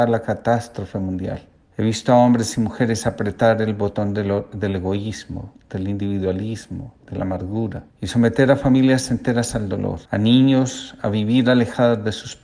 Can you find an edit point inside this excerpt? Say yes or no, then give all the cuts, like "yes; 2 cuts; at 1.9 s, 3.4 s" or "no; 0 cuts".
yes; 3 cuts; at 1.7 s, 7.9 s, 10.1 s